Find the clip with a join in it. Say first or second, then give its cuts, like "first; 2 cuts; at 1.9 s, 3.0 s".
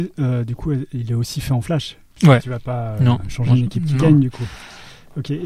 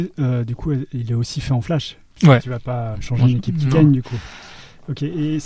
second; 1 cut; at 2.9 s